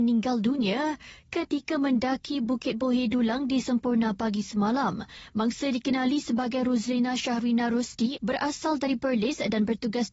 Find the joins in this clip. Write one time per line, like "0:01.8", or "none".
0:08.2

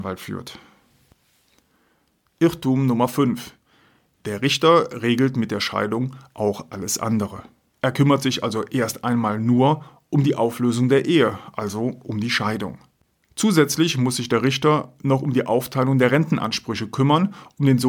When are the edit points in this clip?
0:07.7

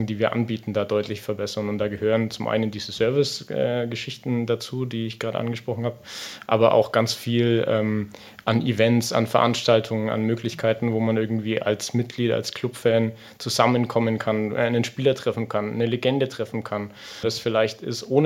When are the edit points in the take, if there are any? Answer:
0:17.2

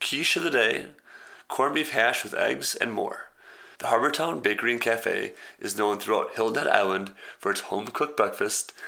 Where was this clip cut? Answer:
0:03.8

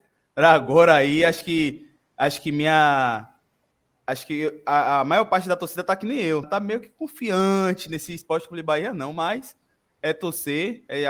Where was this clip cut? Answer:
0:06.4

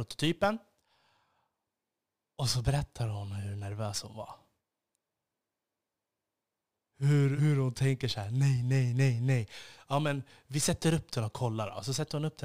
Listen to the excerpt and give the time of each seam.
0:07.4

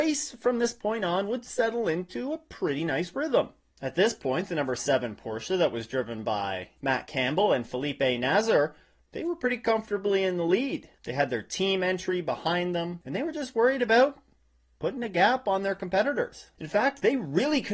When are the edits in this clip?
none

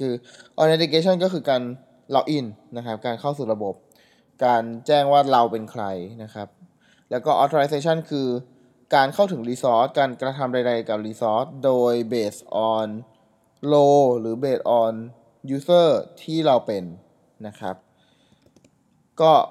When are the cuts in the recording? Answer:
none

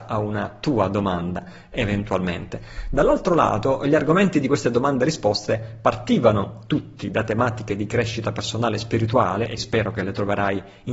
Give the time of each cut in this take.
0:09.6

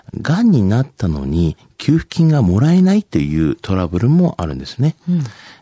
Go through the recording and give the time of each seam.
none

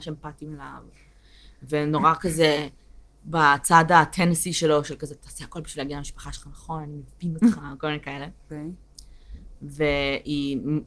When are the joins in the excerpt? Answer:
0:08.5
0:09.6

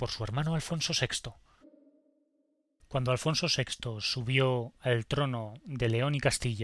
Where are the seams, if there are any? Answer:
0:01.6

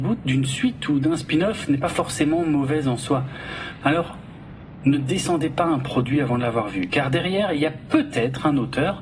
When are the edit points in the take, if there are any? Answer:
0:03.8

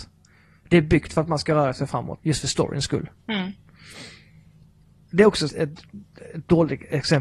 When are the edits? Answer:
0:02.2
0:05.5

